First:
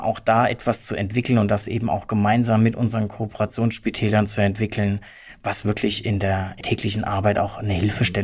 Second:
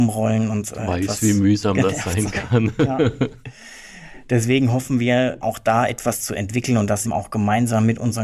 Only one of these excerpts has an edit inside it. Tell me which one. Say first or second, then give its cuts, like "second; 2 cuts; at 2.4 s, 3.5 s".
second; 2 cuts; at 5.4 s, 7.0 s